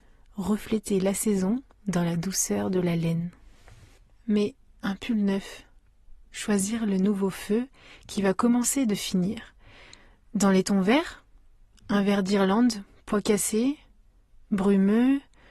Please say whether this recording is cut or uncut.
uncut